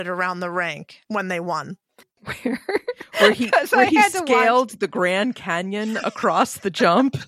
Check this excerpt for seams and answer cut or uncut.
cut